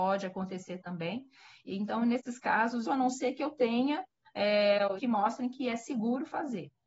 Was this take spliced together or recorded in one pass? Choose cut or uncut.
cut